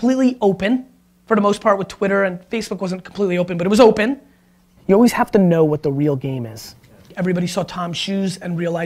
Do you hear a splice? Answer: yes; 1 cut; at 4.8 s

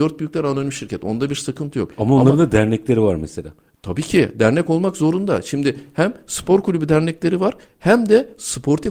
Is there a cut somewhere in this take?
no; 0 cuts

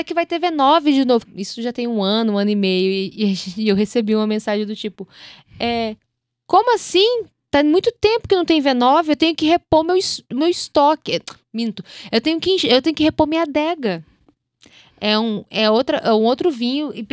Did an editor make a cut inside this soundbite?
yes; 1 cut; at 1.3 s

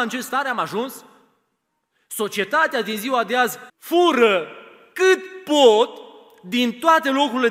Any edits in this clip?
yes; 1 cut; at 3.7 s

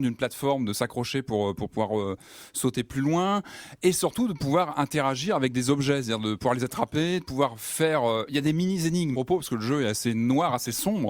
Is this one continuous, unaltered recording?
no; 1 cut; at 9.1 s

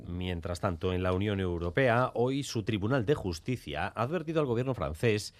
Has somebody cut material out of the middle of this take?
no; 0 cuts

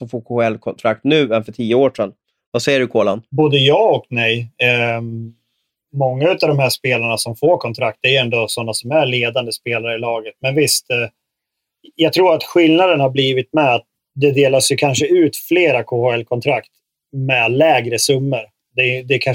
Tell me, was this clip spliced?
no; 0 cuts

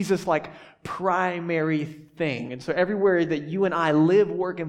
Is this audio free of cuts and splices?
no; 1 cut; at 2.5 s

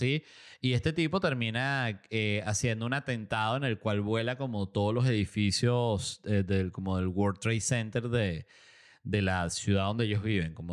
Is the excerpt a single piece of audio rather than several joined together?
yes; 0 cuts

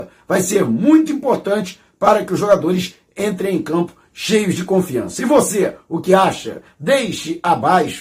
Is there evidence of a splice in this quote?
no; 0 cuts

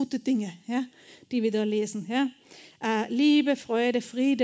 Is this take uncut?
yes; 0 cuts

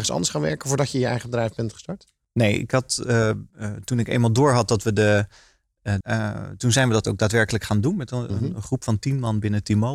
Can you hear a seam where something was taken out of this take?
yes; 2 cuts; at 3.5 s, 6.0 s

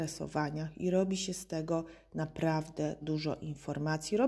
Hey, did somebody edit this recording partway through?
yes; 1 cut; at 3.0 s

